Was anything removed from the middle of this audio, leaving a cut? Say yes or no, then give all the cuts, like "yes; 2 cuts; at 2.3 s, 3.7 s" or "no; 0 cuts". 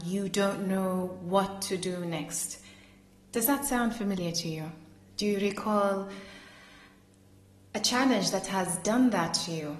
no; 0 cuts